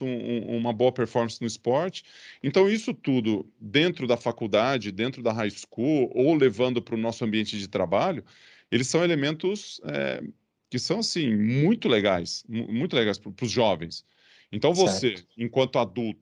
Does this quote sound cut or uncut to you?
uncut